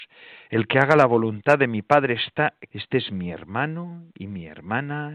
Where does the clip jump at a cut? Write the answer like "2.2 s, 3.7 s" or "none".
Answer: 2.7 s